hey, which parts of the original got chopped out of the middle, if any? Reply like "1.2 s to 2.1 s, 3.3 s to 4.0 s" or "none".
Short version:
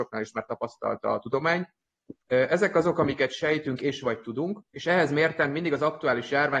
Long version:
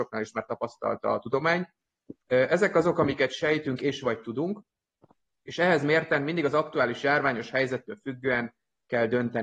4.7 s to 5.4 s